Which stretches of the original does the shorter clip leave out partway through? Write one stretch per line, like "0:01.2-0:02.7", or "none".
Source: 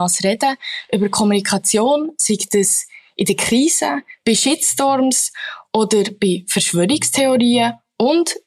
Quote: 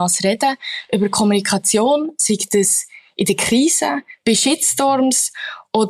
none